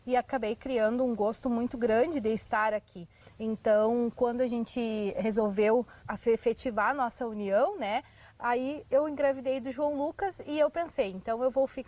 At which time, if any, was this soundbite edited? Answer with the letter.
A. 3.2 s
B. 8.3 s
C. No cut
A